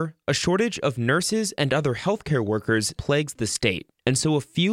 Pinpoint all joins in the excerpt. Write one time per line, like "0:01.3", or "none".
0:03.0

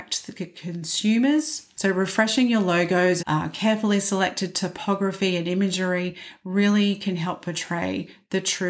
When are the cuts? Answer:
0:01.8
0:03.2

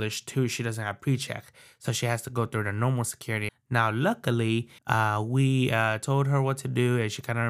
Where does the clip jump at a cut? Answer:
0:03.5
0:04.8

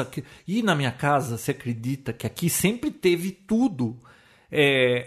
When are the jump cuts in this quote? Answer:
none

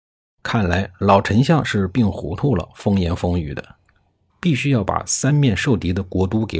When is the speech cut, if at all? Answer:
0:04.3

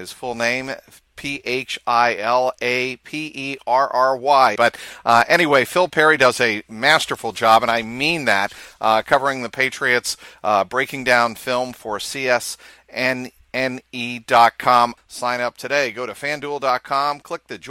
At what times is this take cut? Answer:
0:04.6
0:15.0

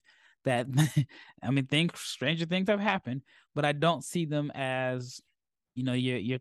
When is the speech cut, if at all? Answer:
none

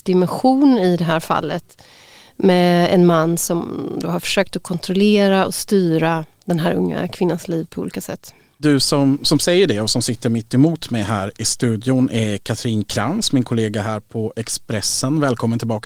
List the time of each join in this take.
none

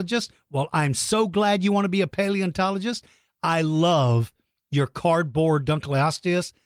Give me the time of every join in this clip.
none

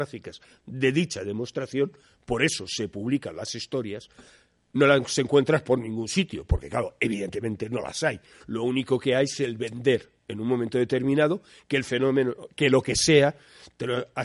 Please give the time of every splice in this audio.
none

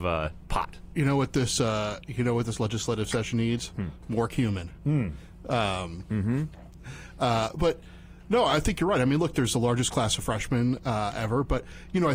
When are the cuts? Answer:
none

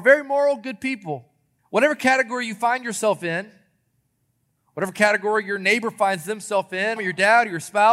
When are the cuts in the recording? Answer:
0:01.6
0:07.0

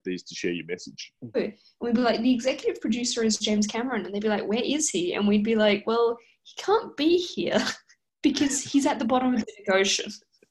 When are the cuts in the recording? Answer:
0:01.3

